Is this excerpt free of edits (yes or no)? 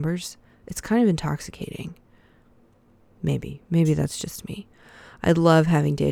yes